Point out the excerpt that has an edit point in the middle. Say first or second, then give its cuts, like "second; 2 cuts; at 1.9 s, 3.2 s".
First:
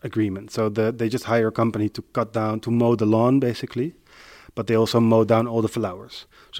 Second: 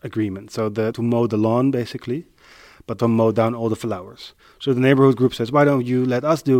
second; 2 cuts; at 0.9 s, 3.0 s